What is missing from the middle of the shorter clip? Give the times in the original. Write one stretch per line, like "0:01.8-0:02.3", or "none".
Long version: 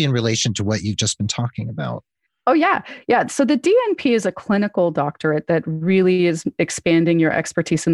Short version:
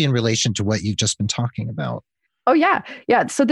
none